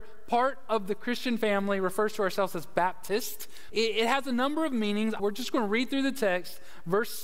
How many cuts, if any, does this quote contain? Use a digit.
2